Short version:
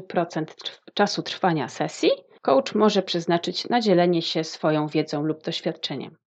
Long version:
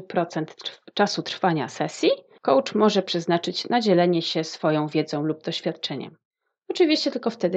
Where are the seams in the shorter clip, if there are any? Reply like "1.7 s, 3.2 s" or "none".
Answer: none